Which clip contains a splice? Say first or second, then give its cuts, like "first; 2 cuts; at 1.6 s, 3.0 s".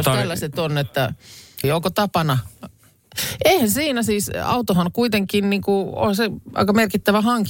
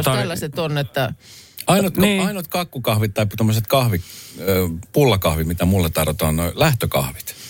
first; 1 cut; at 1.6 s